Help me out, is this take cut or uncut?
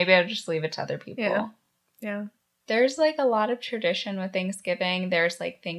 uncut